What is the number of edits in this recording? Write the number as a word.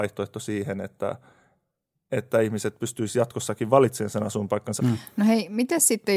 one